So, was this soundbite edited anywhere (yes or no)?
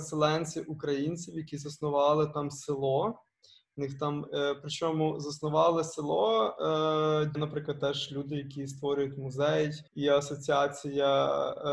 yes